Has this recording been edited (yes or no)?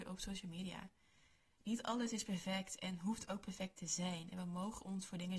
no